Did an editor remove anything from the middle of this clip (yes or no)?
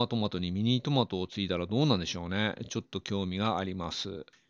no